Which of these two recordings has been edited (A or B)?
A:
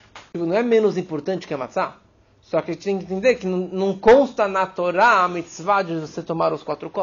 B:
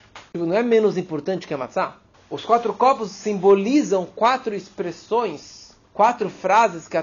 B